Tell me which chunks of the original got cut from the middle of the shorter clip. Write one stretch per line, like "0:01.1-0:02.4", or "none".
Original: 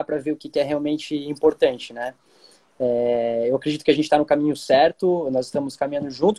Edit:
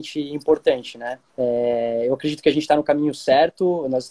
0:02.2-0:02.7